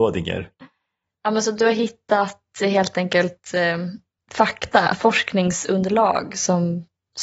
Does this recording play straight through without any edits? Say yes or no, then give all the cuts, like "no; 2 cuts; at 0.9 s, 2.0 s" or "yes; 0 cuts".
yes; 0 cuts